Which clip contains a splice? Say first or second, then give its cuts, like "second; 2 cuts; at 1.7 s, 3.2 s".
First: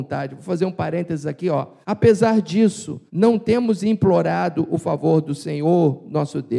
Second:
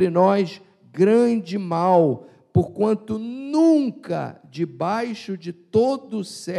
first; 2 cuts; at 1.8 s, 3.1 s